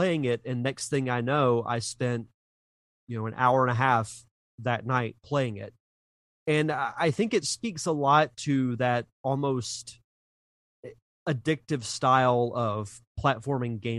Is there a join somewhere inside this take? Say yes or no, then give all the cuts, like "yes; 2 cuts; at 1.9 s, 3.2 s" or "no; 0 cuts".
no; 0 cuts